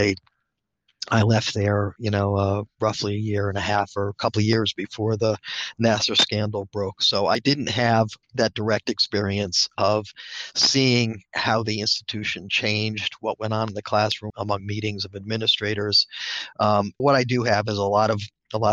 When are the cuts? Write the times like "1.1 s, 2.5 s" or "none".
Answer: 8.2 s, 14.3 s, 17.0 s